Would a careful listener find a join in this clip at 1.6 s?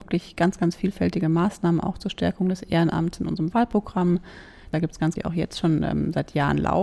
no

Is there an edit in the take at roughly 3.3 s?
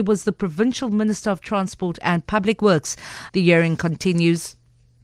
yes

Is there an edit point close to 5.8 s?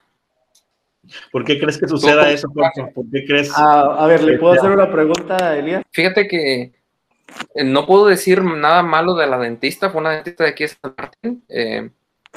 yes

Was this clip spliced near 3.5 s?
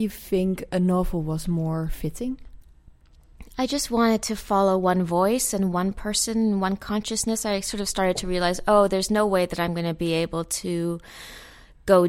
no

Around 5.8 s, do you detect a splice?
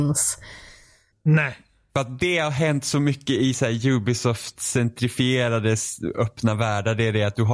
no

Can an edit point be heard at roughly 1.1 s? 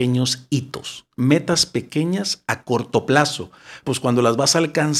yes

